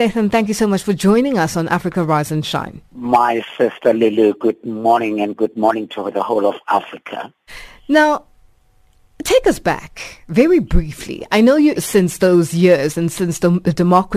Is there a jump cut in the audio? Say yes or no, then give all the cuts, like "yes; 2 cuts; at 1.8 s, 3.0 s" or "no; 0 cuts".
yes; 2 cuts; at 2.9 s, 11.7 s